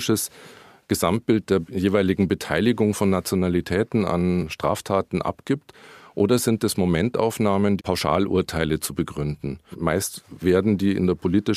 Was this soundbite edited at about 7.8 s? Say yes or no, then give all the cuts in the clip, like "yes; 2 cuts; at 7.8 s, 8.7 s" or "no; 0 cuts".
yes; 2 cuts; at 7.8 s, 9.7 s